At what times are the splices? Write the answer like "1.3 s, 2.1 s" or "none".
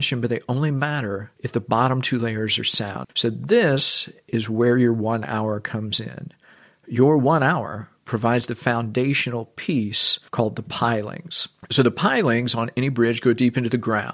3.0 s